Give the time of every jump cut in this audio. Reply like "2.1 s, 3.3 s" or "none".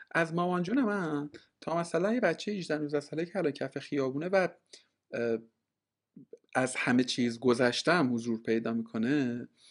6.4 s